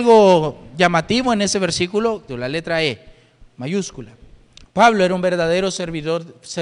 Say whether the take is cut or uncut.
cut